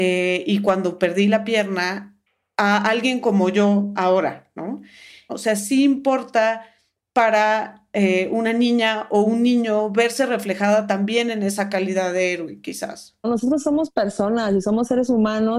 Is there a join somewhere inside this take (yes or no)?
yes